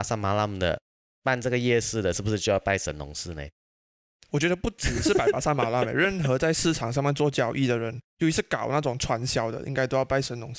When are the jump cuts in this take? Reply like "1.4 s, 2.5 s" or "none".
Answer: none